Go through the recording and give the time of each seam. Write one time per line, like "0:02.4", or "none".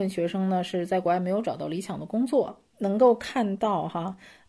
none